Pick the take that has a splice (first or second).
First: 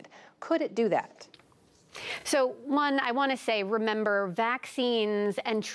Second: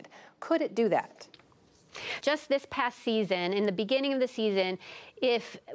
second